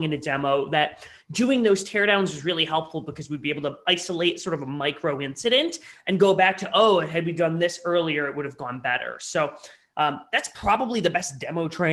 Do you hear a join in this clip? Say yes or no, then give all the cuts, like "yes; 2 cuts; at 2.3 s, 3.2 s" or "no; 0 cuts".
no; 0 cuts